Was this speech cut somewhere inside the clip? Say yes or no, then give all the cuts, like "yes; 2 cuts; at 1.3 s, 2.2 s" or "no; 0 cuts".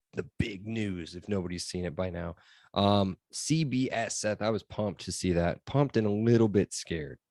no; 0 cuts